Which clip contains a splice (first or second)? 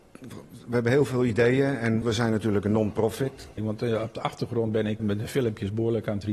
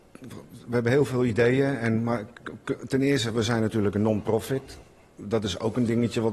first